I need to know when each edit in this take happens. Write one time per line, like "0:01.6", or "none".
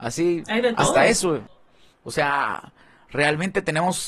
none